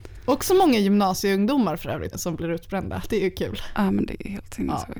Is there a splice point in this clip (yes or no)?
yes